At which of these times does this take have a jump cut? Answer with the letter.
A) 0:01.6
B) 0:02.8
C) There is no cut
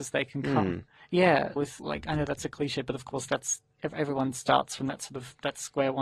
A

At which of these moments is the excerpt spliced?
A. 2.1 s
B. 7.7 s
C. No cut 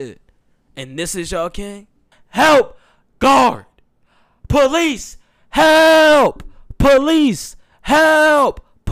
A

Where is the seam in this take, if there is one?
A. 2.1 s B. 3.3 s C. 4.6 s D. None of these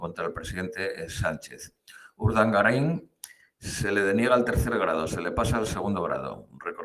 D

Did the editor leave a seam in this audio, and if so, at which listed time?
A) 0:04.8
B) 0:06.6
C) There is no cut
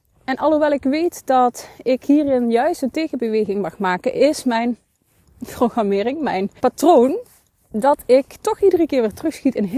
B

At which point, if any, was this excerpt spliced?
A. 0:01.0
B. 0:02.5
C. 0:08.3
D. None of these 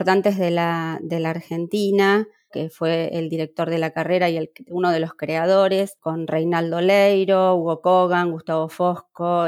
B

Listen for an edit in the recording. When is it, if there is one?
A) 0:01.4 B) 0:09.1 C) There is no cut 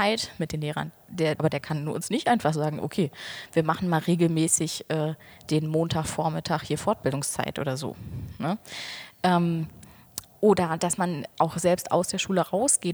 A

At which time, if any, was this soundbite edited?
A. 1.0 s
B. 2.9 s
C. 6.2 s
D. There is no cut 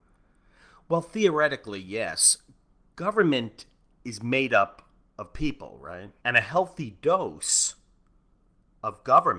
C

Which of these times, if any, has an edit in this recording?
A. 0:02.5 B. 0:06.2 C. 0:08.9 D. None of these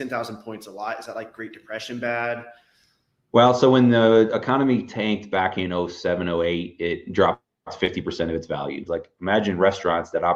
C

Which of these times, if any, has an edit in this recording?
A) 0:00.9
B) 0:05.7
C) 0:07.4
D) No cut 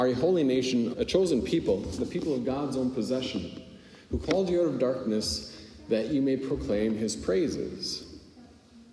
A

